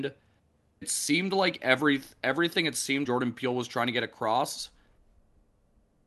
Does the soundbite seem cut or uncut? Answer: cut